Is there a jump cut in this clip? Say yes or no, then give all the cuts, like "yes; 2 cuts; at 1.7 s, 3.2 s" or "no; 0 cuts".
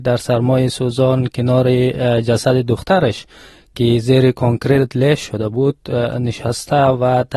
no; 0 cuts